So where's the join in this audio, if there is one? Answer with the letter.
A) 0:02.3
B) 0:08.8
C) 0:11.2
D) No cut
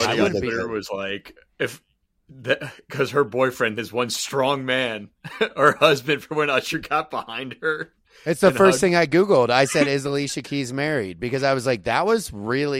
D